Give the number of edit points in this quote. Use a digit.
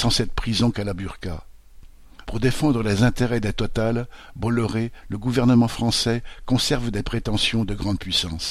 2